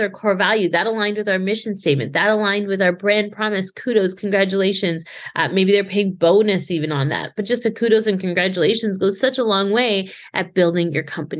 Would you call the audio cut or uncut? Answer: uncut